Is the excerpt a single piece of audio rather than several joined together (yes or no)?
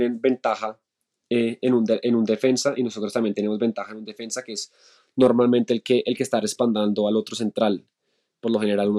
yes